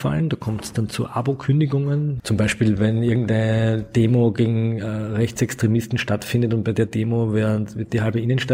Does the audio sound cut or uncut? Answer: cut